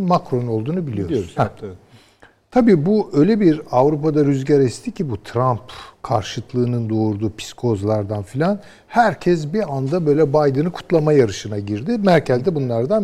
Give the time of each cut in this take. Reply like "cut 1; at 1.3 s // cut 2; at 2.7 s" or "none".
cut 1; at 1.4 s

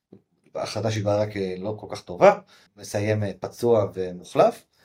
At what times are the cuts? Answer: cut 1; at 2.7 s

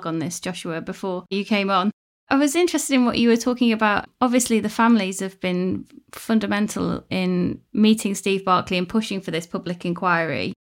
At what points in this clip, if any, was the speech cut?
none

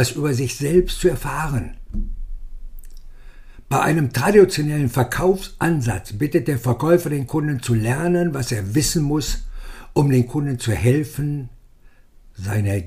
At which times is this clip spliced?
none

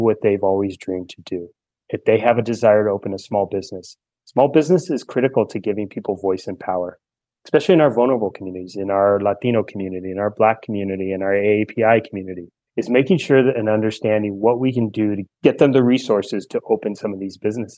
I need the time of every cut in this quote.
none

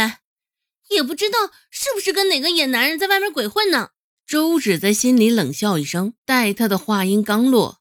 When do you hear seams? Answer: cut 1; at 4.2 s // cut 2; at 6.2 s

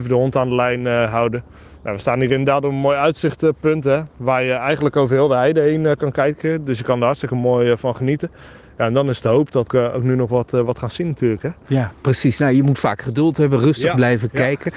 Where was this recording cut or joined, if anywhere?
cut 1; at 9.7 s

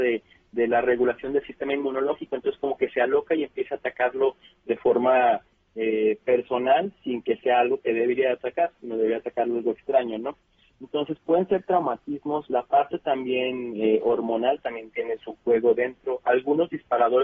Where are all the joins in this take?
none

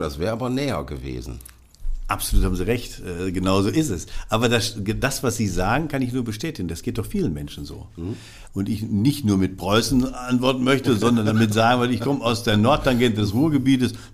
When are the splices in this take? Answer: cut 1; at 8.5 s

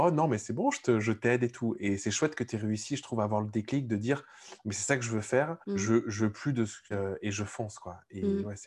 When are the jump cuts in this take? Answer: cut 1; at 5.6 s // cut 2; at 6.9 s

